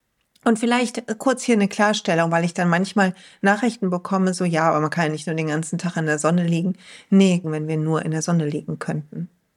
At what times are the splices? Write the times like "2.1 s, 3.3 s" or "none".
7.4 s